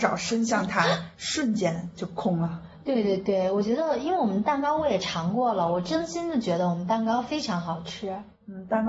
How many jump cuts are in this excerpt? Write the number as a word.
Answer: zero